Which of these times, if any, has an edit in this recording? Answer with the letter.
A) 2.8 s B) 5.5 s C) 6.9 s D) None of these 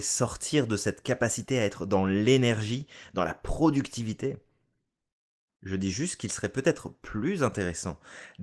B